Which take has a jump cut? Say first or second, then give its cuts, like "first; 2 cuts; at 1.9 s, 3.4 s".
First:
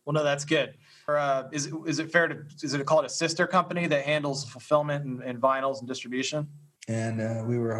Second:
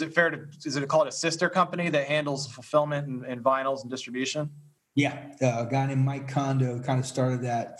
first; 2 cuts; at 1.1 s, 6.8 s